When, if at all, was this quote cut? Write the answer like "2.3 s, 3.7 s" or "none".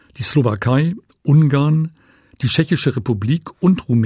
none